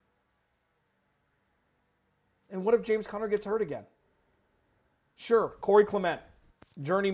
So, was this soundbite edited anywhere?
no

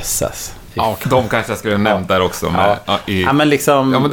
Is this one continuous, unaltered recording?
no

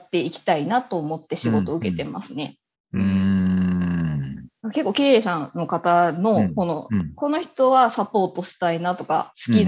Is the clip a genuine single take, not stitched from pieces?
yes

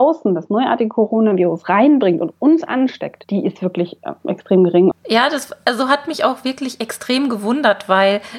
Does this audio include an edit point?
yes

